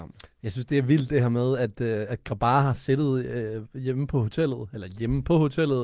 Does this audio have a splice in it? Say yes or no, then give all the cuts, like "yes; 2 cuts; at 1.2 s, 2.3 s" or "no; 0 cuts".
no; 0 cuts